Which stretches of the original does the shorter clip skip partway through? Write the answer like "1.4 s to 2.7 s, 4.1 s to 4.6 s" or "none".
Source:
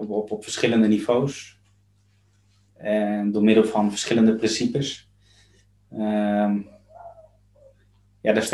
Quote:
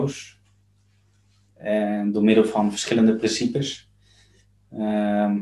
none